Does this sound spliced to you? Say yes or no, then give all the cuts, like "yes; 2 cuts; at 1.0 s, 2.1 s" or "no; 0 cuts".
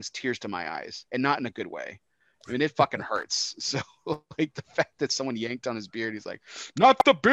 no; 0 cuts